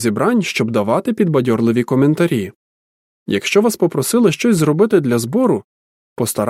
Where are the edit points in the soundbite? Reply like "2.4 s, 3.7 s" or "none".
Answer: 3.1 s